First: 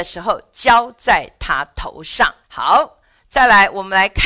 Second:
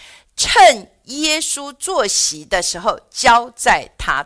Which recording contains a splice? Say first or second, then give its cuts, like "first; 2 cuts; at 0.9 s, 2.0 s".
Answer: first; 1 cut; at 2.4 s